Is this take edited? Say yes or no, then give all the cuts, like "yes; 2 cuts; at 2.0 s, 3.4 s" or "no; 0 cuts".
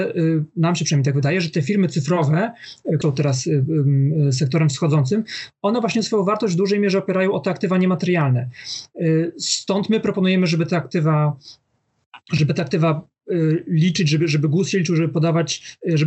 yes; 1 cut; at 3.0 s